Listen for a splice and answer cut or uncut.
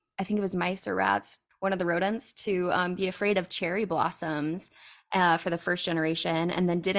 uncut